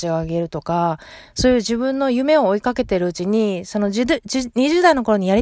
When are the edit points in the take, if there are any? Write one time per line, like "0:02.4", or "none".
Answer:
none